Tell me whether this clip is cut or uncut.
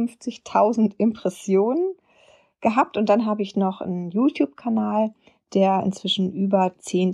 uncut